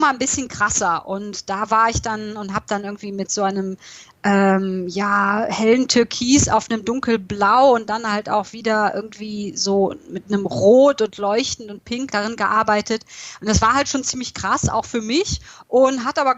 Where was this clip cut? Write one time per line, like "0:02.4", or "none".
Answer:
0:12.1